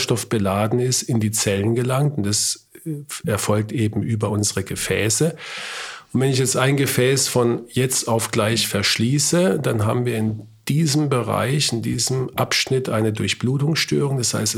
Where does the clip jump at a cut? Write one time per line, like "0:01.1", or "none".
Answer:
none